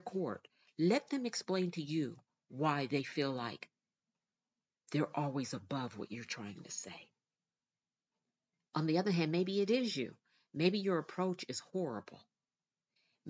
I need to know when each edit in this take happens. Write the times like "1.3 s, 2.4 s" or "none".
none